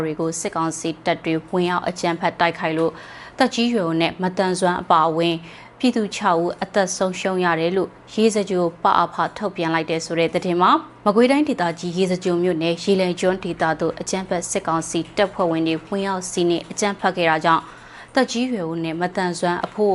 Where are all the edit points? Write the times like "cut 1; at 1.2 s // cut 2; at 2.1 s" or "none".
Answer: none